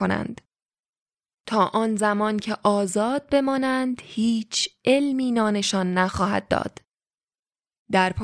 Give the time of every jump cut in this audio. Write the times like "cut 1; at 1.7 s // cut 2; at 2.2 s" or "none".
none